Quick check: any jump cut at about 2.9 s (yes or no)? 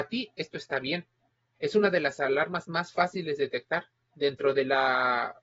no